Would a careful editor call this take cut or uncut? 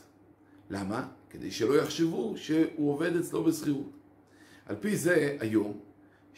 uncut